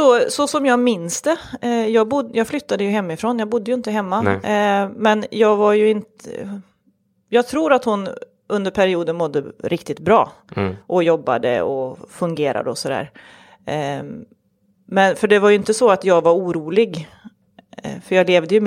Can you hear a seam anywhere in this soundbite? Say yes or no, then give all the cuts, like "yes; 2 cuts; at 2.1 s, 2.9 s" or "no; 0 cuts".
no; 0 cuts